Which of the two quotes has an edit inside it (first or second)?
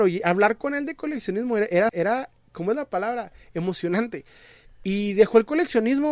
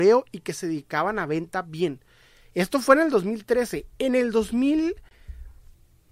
first